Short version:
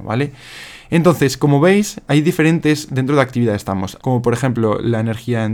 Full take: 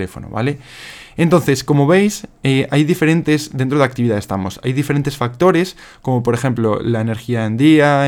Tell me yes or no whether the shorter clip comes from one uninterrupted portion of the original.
no